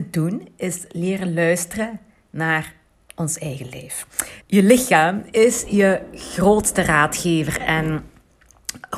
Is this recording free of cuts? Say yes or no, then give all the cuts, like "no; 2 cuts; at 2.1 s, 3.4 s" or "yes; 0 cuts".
no; 1 cut; at 4.4 s